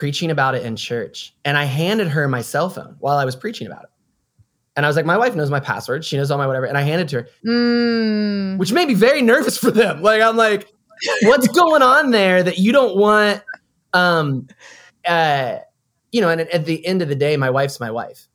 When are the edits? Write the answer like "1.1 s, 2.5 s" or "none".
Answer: 7.4 s